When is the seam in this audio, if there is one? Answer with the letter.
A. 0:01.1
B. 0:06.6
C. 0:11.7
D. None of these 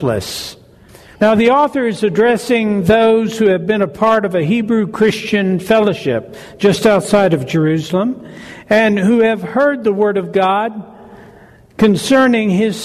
A